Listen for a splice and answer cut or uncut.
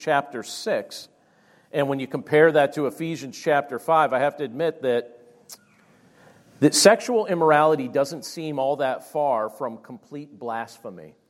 uncut